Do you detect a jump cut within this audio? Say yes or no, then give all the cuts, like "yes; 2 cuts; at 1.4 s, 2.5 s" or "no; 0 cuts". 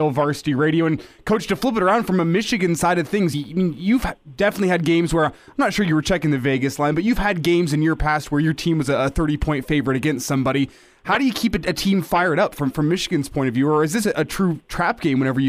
no; 0 cuts